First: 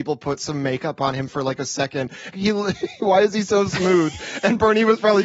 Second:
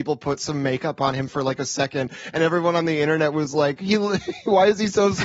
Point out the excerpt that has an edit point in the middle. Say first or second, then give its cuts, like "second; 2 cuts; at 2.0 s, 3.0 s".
first; 1 cut; at 2.3 s